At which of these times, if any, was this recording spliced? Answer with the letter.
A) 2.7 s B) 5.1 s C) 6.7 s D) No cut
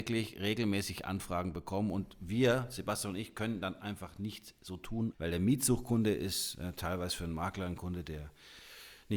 B